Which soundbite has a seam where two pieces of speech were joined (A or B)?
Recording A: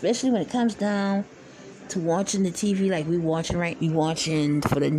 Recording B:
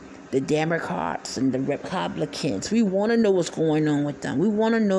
A